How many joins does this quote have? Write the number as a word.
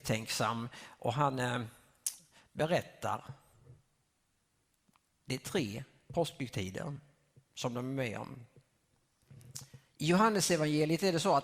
one